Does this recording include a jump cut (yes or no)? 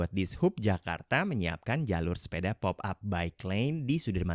no